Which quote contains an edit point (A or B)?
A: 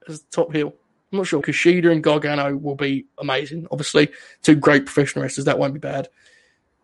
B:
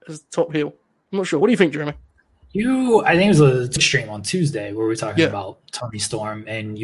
A